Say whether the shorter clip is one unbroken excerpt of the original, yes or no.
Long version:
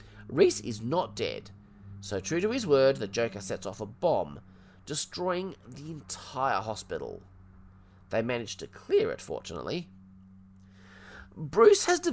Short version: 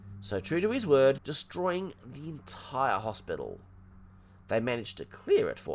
no